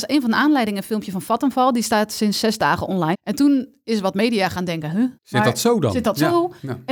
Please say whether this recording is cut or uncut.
cut